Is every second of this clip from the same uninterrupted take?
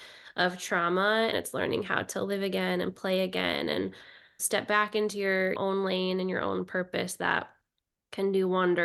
no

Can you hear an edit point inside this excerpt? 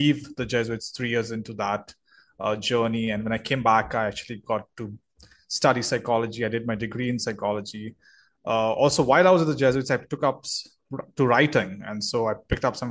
no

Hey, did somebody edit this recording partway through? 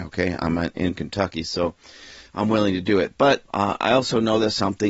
no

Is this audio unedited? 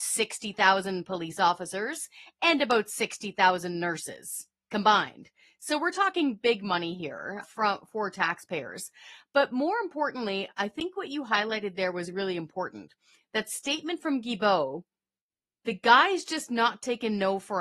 no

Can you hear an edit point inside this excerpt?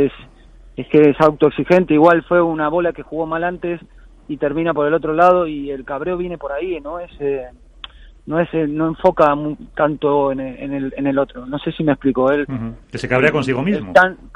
no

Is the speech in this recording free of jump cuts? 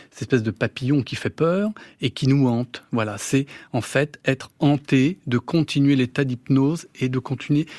yes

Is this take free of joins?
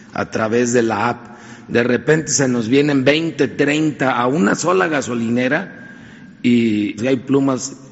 no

